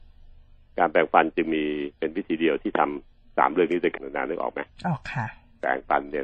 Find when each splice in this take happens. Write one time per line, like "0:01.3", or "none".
0:04.0